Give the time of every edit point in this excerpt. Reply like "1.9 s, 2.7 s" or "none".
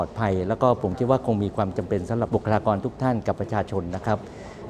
2.3 s